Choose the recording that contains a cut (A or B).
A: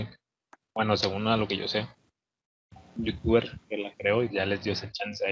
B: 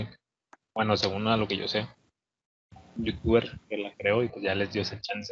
A